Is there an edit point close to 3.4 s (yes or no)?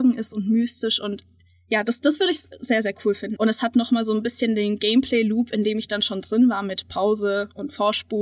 yes